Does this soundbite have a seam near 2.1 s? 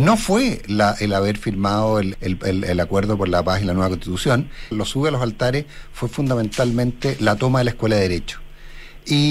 yes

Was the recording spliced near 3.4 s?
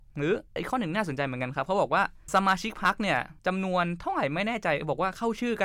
yes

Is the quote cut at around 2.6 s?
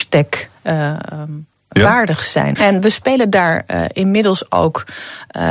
yes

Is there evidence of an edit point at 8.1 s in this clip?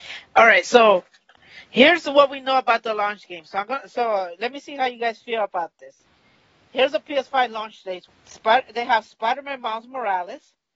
yes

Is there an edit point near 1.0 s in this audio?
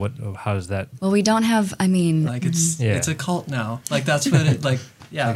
yes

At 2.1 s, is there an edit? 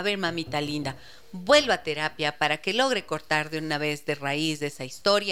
no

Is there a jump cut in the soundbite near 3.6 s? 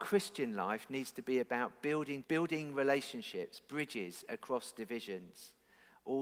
no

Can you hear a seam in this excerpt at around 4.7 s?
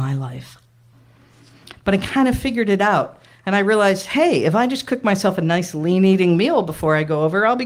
no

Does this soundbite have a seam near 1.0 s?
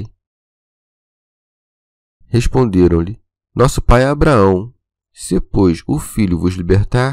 no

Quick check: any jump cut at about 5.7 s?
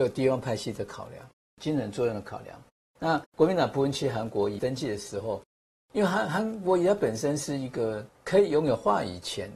no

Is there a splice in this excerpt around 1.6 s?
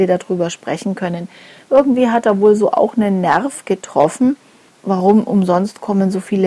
yes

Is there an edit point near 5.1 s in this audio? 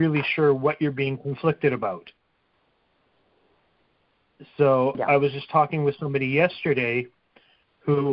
no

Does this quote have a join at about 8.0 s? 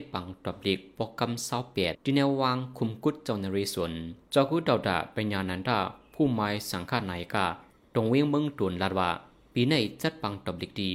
no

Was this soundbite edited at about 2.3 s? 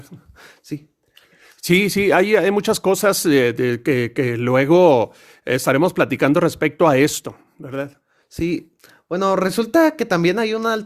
no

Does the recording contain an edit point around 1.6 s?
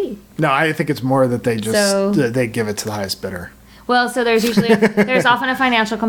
no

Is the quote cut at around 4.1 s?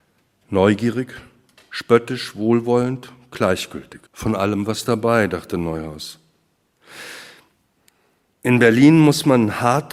yes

